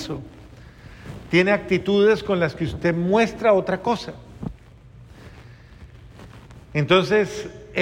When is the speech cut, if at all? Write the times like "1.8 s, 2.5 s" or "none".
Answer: none